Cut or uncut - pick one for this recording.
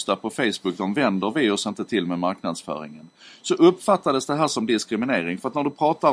uncut